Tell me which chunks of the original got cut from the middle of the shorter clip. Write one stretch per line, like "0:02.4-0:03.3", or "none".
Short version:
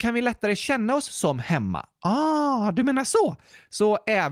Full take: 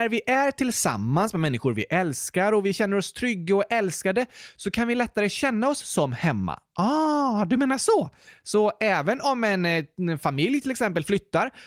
none